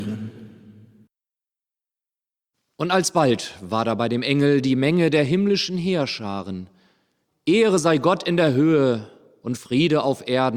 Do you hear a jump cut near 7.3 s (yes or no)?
yes